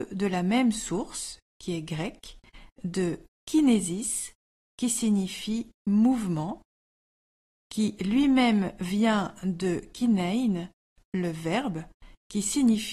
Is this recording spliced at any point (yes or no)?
no